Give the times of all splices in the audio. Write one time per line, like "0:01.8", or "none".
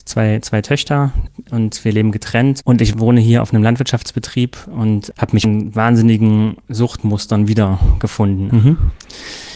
0:02.6
0:08.5